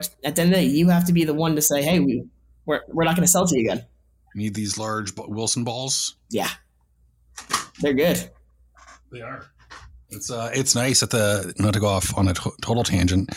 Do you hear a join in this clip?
no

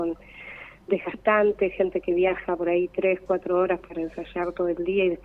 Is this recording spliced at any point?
no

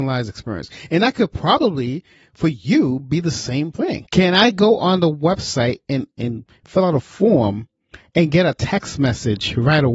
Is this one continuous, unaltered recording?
no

